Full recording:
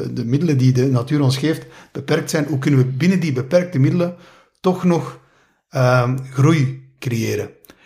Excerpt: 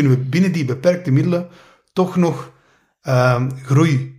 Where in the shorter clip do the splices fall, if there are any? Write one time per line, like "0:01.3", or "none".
none